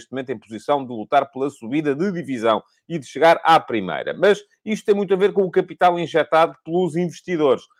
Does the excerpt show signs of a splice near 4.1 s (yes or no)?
no